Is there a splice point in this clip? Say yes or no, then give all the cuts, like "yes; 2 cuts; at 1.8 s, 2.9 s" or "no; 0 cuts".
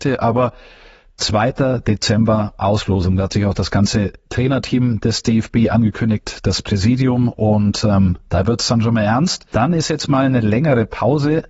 no; 0 cuts